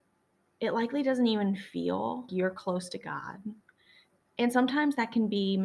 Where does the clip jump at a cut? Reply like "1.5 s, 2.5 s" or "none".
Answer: 2.3 s